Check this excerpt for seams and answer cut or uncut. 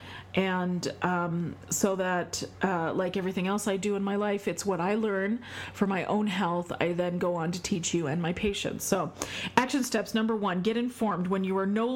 uncut